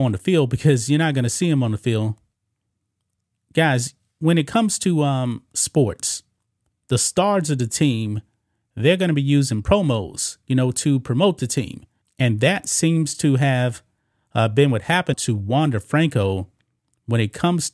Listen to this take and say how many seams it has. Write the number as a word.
two